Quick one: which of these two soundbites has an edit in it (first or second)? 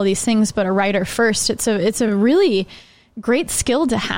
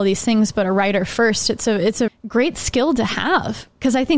second